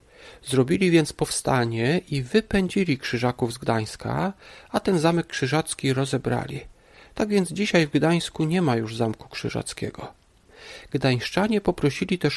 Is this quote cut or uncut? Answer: uncut